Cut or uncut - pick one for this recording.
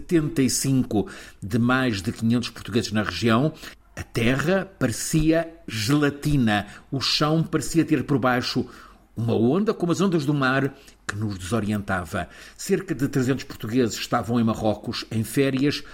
cut